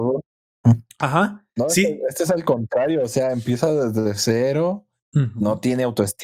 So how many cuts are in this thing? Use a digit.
0